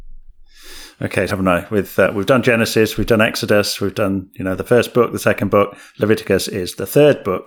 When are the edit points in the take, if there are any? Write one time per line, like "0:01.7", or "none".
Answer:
0:01.3